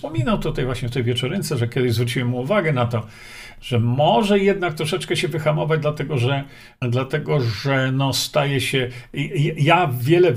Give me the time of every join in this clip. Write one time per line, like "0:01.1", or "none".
0:06.8